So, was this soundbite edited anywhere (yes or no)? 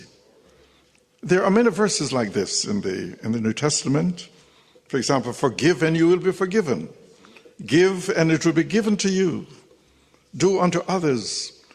no